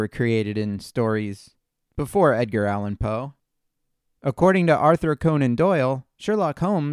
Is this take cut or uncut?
uncut